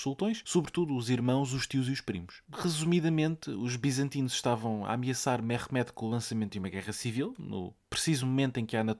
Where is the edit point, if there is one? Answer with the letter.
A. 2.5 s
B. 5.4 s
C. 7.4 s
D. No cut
A